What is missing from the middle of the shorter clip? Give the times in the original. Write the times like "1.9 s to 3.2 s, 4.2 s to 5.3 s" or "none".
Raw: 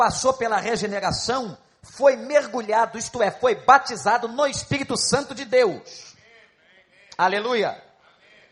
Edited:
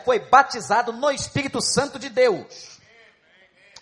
none

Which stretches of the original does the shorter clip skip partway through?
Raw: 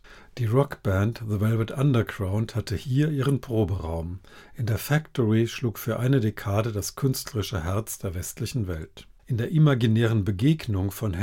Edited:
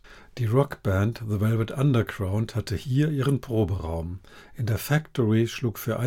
none

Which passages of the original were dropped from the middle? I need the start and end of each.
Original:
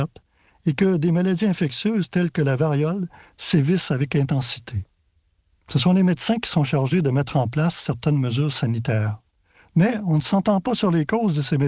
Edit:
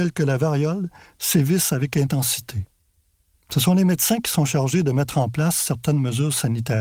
none

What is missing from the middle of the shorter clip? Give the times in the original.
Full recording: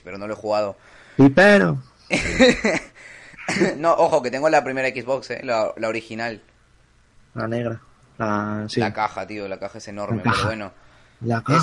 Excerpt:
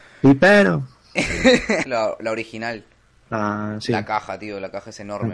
2.8 s to 5.4 s, 6.8 s to 8.1 s

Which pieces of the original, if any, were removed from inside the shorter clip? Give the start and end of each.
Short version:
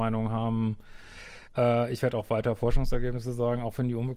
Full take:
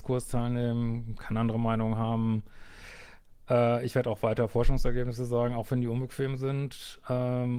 3.1 s to 3.4 s

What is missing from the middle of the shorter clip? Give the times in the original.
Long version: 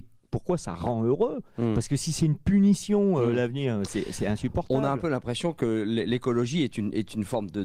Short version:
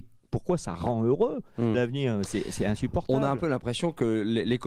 1.7 s to 3.4 s

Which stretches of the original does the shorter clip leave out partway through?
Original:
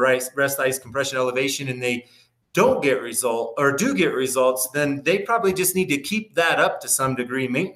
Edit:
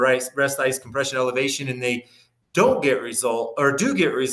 none

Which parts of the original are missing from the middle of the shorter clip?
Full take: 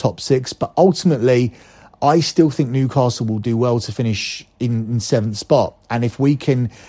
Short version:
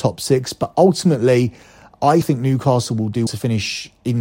2.2 s to 2.5 s, 3.6 s to 3.8 s

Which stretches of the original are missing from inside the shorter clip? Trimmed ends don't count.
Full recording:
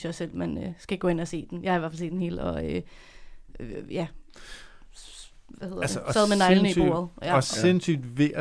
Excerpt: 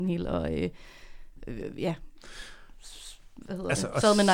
none

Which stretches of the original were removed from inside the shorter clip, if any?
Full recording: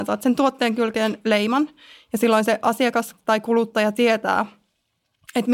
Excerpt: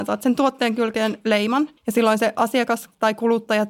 1.8 s to 2.0 s

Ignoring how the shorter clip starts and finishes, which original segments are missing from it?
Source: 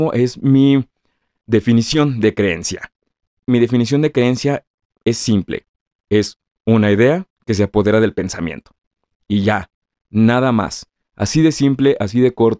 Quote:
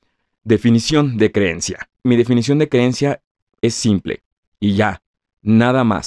3.0 s to 3.4 s, 5.9 s to 9.1 s

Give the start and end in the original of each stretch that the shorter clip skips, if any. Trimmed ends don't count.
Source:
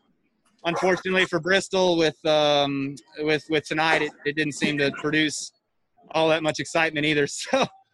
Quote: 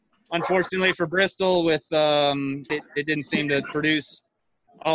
3.0 s to 4.0 s

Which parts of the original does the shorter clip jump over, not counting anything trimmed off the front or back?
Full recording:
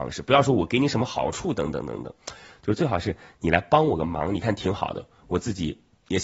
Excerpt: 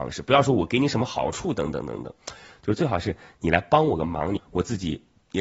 4.4 s to 5.1 s

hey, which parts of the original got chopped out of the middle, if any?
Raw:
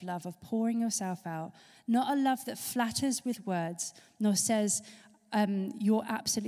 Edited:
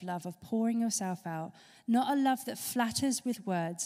none

